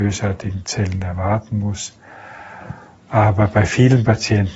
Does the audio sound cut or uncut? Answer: uncut